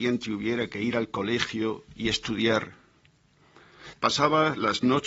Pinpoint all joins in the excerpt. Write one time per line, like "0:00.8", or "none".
0:03.9